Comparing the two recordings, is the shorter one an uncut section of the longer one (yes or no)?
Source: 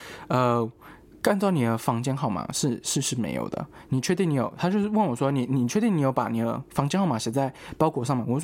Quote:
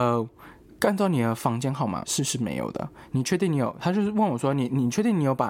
no